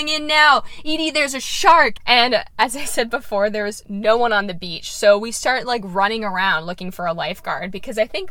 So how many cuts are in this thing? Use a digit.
1